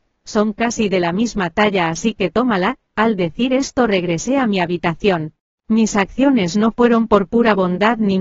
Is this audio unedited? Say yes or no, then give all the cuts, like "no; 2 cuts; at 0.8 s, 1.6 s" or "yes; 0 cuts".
yes; 0 cuts